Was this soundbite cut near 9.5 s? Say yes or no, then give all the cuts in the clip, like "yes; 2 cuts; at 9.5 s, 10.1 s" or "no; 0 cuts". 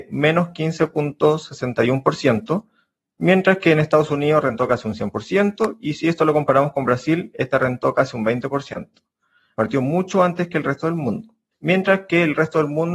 yes; 2 cuts; at 9.5 s, 11.5 s